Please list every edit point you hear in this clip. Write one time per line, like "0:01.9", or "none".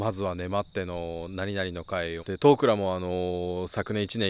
0:02.2